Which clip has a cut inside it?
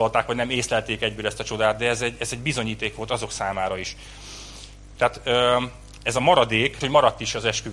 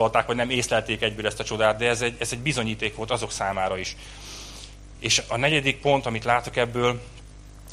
first; 2 cuts; at 5.0 s, 6.8 s

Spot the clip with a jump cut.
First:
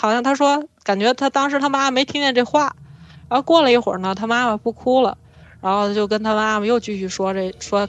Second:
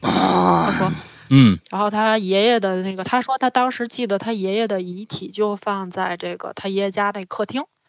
second; 1 cut; at 1.3 s

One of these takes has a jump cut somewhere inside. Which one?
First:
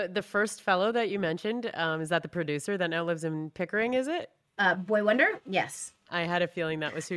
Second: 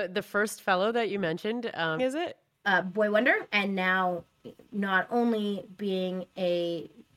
second; 2 cuts; at 2.0 s, 3.5 s

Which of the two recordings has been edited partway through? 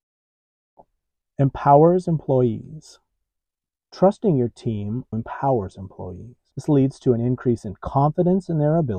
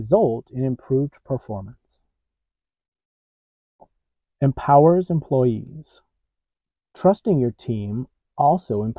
first; 2 cuts; at 5.1 s, 6.5 s

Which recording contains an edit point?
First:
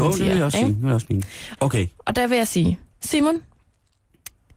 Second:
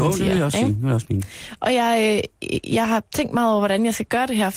first; 1 cut; at 1.6 s

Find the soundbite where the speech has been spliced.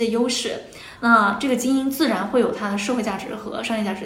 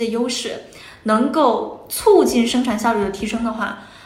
first; 1 cut; at 1.0 s

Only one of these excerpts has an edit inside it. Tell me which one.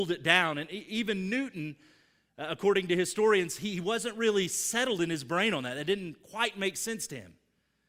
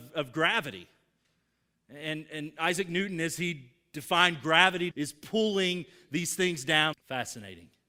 second; 2 cuts; at 4.9 s, 6.9 s

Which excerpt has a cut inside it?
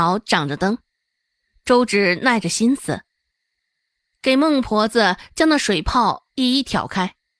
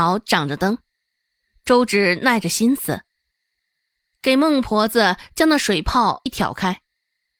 second; 1 cut; at 6.3 s

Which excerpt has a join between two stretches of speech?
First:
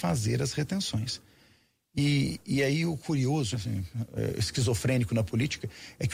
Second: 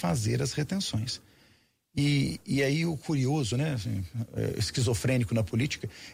first; 1 cut; at 3.5 s

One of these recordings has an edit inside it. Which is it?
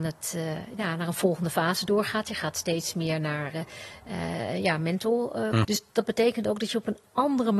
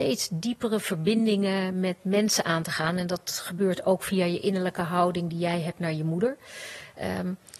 first; 1 cut; at 5.6 s

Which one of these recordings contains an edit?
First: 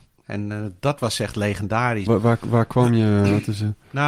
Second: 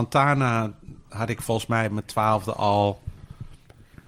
first; 1 cut; at 2.1 s

